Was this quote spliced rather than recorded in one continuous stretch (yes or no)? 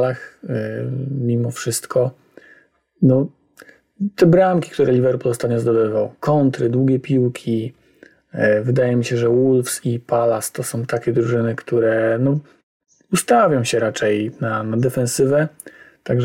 no